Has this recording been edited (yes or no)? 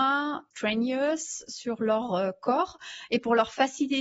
no